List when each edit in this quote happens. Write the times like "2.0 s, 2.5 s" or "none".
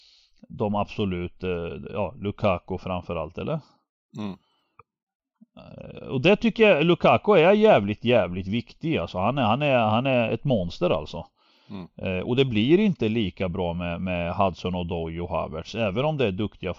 none

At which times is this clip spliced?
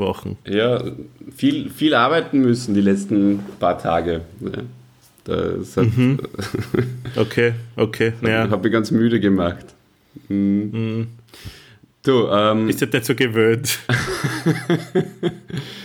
none

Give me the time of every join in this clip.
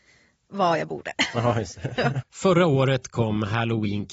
2.2 s

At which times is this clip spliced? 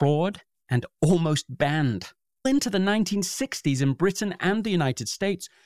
none

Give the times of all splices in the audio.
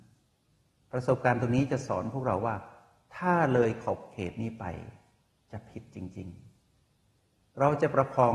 none

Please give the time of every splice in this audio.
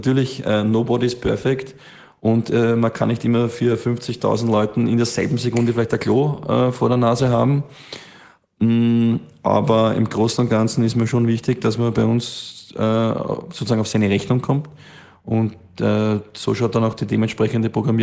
none

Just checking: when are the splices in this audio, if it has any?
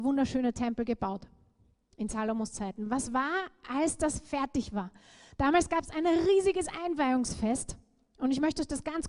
none

